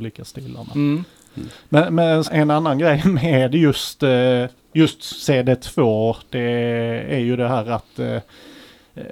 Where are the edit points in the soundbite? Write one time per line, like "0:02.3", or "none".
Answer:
0:02.2